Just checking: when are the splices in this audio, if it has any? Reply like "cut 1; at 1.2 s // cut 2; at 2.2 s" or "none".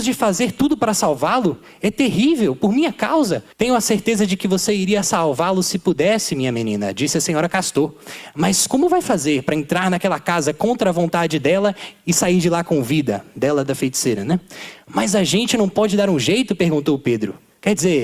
cut 1; at 3.5 s